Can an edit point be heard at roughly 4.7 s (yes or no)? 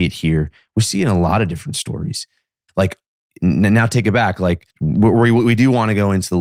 yes